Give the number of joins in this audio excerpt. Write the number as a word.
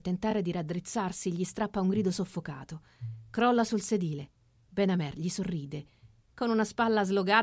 zero